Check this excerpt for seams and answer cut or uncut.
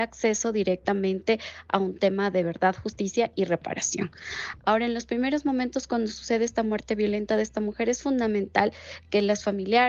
uncut